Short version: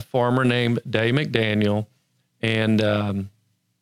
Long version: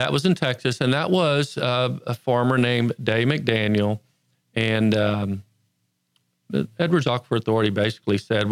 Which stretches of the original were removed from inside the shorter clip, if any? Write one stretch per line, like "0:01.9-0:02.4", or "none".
none